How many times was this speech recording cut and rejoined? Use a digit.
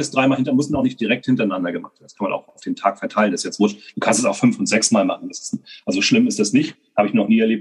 0